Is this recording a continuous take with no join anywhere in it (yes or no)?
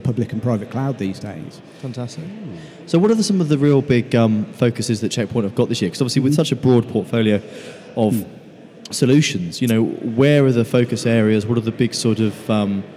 yes